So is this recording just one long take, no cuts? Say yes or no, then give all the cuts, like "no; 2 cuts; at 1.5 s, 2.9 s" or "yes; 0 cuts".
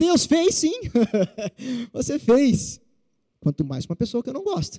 no; 1 cut; at 3.3 s